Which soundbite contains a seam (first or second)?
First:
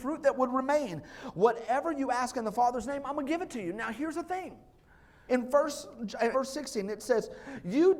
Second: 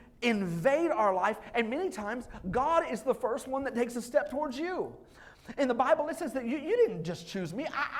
first